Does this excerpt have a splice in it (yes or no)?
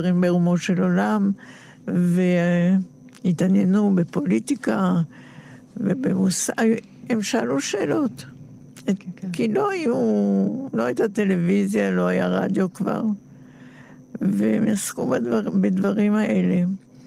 no